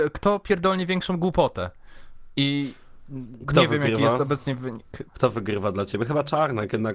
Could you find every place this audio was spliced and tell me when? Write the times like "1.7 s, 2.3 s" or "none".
5.1 s